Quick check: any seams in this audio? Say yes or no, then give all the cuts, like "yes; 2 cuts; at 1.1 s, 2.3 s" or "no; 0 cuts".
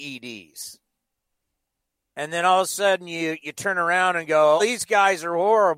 yes; 1 cut; at 4.6 s